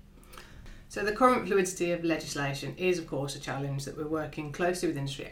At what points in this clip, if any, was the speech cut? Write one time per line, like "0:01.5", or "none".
none